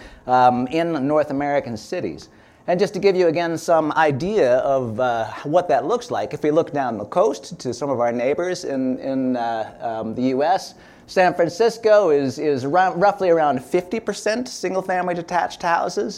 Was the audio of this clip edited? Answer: no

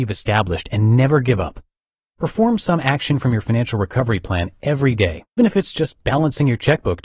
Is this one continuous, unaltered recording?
no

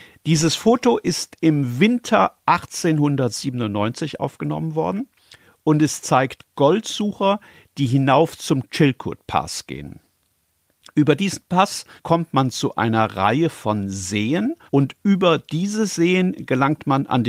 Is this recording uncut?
no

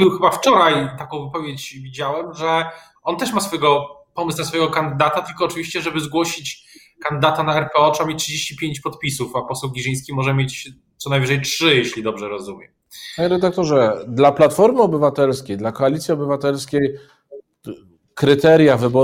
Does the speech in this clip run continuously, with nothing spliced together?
yes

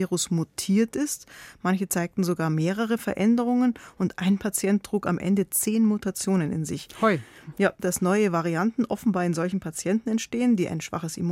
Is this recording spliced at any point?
yes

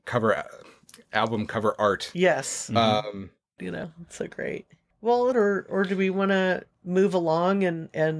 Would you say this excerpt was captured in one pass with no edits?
no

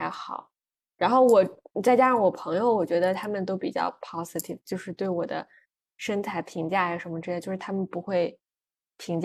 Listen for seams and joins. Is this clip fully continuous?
yes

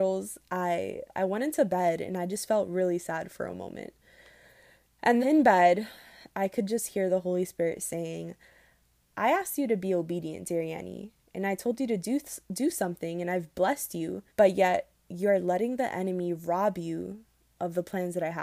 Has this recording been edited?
yes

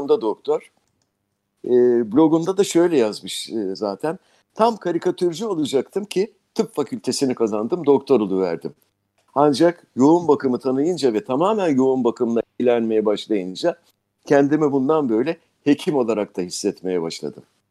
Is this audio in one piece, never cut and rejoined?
yes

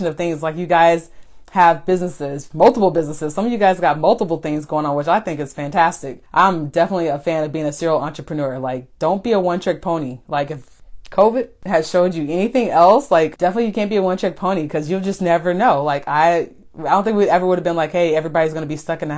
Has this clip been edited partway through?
no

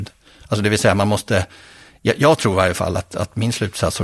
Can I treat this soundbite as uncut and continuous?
yes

